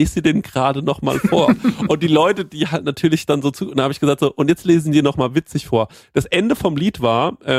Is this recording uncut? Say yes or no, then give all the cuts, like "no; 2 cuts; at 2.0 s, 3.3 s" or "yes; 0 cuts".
yes; 0 cuts